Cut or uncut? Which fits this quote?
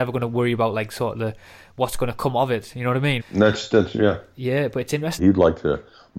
cut